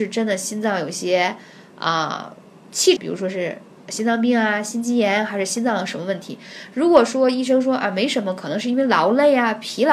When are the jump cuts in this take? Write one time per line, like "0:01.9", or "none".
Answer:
0:03.0